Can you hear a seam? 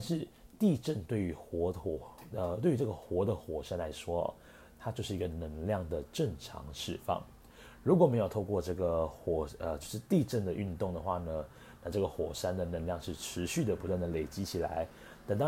no; 0 cuts

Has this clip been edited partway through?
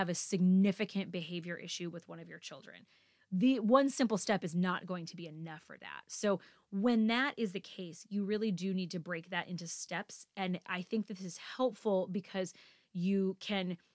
no; 0 cuts

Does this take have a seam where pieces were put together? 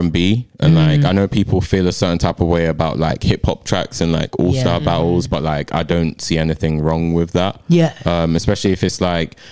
no; 0 cuts

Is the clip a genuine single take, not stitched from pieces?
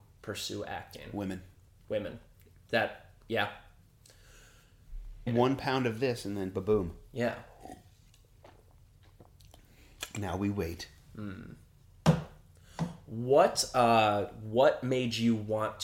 no; 1 cut; at 5.3 s

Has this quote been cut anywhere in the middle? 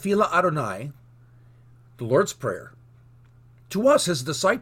no; 0 cuts

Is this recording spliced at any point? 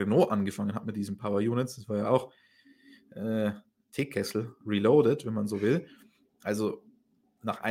no; 0 cuts

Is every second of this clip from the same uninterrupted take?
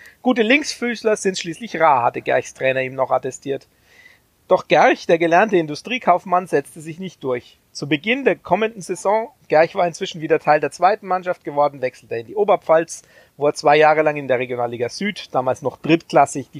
yes; 0 cuts

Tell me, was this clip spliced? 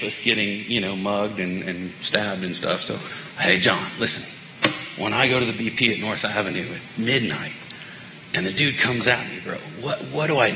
no; 0 cuts

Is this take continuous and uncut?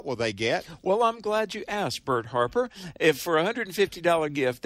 yes; 0 cuts

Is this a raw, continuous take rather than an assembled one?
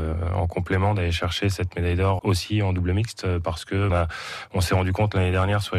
no; 2 cuts; at 2.2 s, 3.9 s

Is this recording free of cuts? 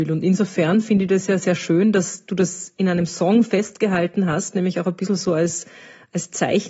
yes; 0 cuts

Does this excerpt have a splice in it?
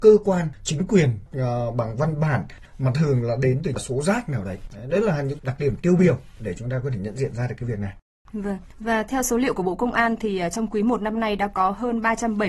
no; 0 cuts

